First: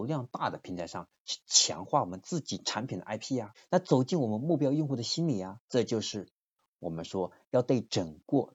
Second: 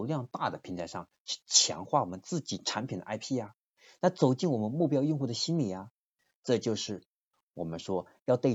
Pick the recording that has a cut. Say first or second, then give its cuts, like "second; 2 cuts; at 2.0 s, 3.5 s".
first; 2 cuts; at 3.5 s, 5.6 s